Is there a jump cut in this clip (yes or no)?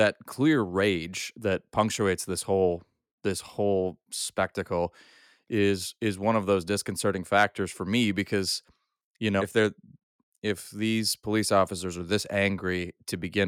yes